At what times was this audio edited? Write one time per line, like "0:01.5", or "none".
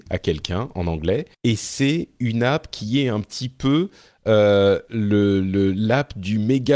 0:01.3